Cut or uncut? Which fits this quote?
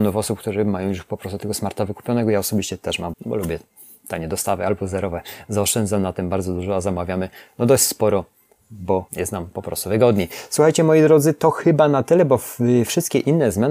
cut